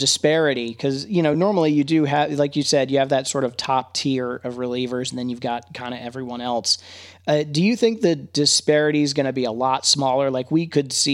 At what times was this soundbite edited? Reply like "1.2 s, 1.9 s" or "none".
none